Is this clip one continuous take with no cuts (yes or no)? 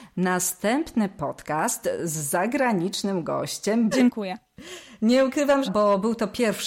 no